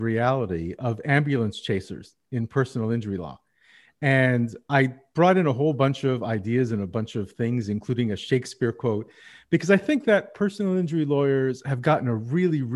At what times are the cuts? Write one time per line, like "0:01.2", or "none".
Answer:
none